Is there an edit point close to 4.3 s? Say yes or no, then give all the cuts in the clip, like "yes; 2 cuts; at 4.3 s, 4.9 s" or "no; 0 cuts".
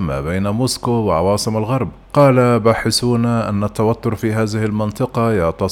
no; 1 cut; at 2.0 s